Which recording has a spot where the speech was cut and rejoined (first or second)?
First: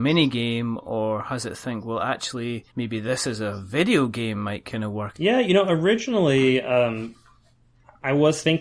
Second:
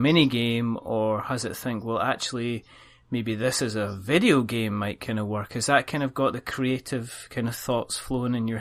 first